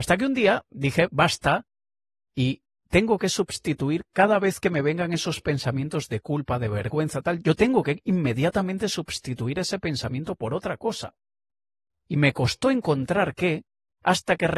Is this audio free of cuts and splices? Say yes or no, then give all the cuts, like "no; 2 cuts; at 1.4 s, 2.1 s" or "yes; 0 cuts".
yes; 0 cuts